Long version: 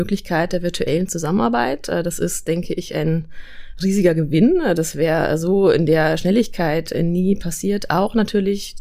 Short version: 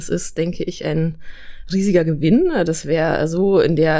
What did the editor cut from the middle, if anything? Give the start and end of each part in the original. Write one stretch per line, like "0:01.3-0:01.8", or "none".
none